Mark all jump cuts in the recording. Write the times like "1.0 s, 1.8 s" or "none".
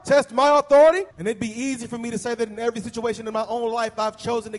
1.1 s